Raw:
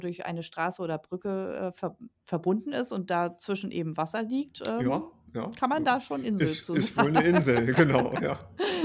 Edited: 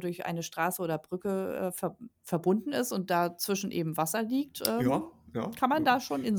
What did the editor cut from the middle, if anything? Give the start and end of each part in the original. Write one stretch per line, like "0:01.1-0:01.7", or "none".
none